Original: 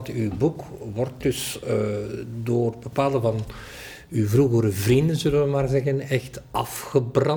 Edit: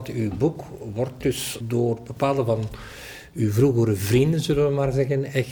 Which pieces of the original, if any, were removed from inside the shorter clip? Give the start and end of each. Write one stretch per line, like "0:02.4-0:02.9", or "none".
0:01.6-0:02.4